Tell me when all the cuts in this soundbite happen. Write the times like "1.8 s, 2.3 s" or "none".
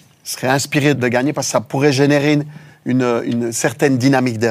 0.9 s